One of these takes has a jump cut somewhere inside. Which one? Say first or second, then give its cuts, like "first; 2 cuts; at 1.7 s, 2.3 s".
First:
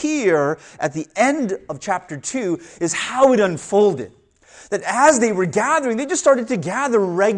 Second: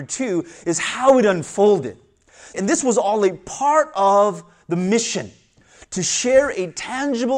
second; 1 cut; at 2.5 s